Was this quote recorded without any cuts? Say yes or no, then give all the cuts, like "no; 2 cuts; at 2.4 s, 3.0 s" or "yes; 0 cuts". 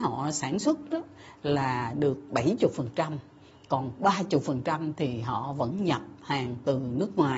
yes; 0 cuts